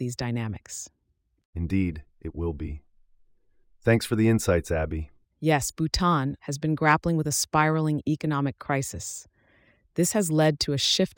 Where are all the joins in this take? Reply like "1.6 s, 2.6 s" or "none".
5.2 s, 6.4 s